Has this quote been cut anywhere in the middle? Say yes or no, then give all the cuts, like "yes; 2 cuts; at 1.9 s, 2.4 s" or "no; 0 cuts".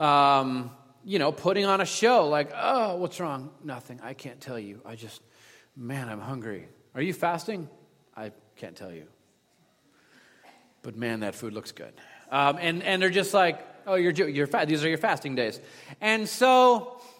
no; 0 cuts